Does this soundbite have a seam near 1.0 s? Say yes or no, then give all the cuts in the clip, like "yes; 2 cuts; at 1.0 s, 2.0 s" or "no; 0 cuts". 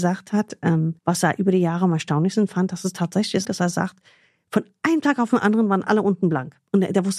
yes; 2 cuts; at 1.0 s, 3.4 s